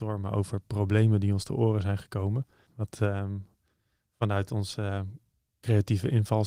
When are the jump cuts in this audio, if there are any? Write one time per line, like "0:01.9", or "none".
0:02.7

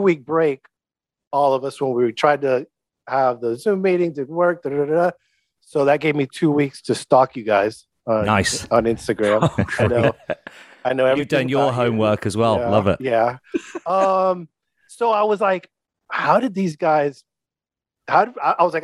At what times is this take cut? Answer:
none

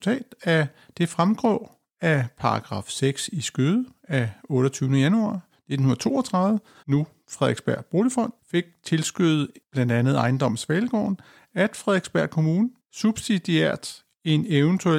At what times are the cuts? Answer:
0:06.8

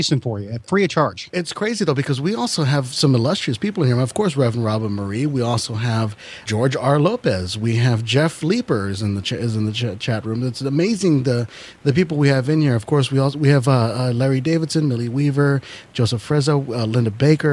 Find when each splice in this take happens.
0:06.5

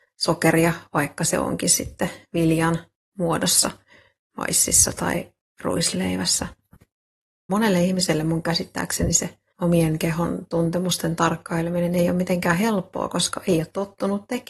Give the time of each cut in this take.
0:07.5
0:09.5

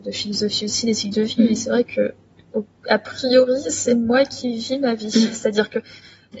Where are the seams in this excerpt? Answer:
none

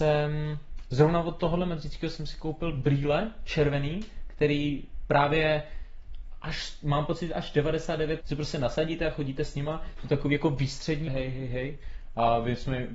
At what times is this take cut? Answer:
0:08.2
0:11.1

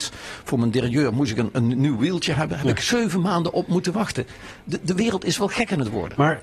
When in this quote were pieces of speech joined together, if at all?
none

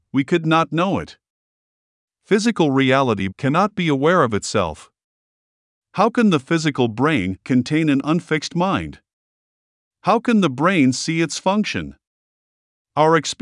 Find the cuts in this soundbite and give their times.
0:03.3

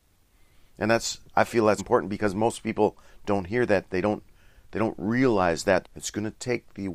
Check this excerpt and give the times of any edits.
0:01.8
0:05.8

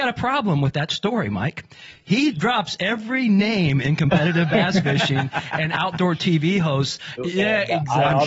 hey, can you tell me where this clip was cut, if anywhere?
0:07.2

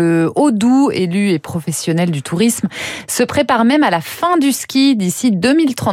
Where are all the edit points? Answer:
none

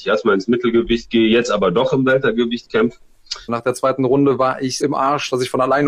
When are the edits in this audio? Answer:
0:03.5
0:04.8

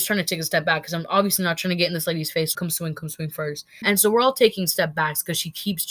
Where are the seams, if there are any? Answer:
0:02.6
0:03.8

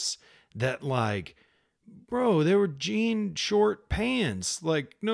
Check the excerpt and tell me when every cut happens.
none

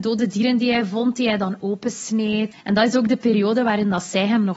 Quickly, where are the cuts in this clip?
0:02.5

